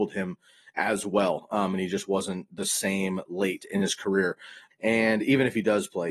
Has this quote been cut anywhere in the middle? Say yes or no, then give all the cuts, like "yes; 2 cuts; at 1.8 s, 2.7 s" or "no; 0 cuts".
yes; 1 cut; at 4.7 s